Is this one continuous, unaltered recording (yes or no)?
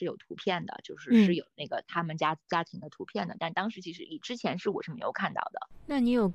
yes